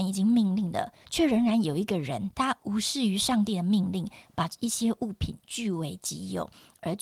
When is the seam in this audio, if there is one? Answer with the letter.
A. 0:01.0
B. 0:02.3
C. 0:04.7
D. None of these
B